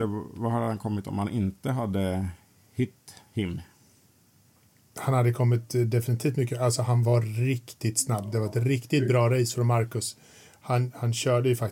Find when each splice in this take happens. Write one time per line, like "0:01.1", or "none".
none